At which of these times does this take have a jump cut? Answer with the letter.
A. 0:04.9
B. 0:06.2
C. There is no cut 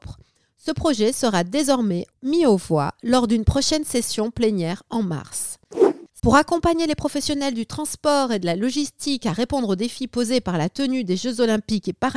B